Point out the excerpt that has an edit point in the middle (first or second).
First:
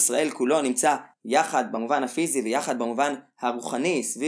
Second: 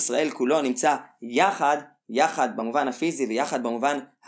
first